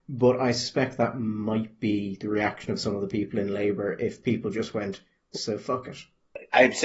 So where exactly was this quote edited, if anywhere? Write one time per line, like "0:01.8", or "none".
0:05.3